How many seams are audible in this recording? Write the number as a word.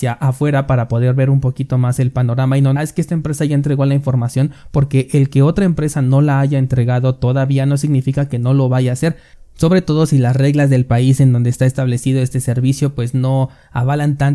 one